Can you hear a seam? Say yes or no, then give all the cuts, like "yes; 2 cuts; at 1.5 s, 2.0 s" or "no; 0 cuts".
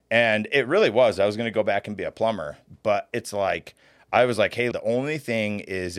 yes; 1 cut; at 4.7 s